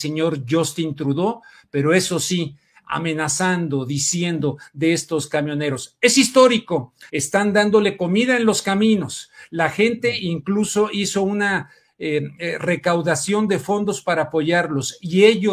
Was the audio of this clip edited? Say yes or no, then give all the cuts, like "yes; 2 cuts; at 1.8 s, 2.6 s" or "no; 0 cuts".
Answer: yes; 1 cut; at 7.1 s